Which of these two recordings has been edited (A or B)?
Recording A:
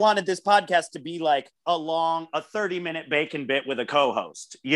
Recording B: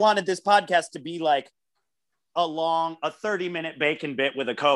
A